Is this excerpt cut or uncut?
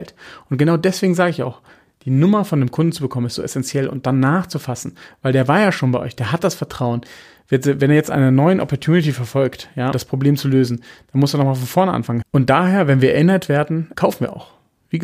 cut